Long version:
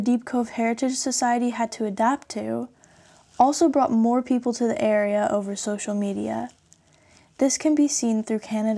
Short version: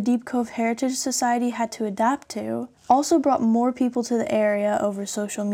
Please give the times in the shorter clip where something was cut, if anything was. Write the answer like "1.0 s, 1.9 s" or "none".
2.8 s